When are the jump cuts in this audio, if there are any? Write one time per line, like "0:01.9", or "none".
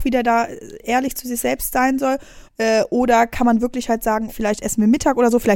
0:02.5
0:04.3